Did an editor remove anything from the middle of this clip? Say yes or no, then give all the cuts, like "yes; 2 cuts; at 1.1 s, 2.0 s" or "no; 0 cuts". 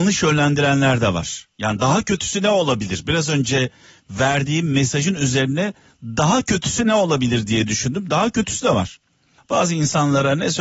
yes; 1 cut; at 9.4 s